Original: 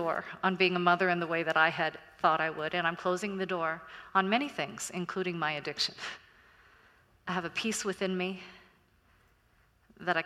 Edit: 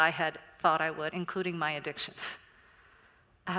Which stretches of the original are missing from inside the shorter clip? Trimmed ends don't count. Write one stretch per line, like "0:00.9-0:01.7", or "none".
0:02.7-0:04.9